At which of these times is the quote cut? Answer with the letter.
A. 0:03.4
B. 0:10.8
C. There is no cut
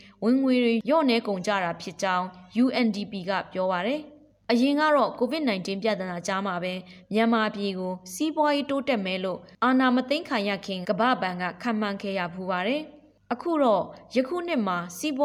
B